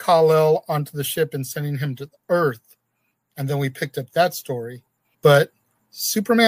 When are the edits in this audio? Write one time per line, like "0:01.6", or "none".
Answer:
0:05.1